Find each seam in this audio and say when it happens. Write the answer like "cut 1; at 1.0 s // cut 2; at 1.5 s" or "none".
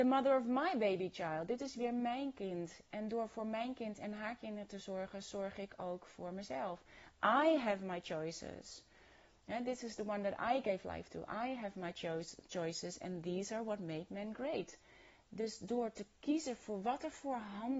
none